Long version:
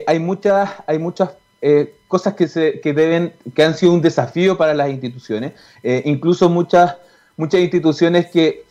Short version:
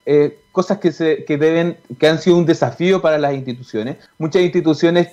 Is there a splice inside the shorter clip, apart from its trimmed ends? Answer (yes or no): yes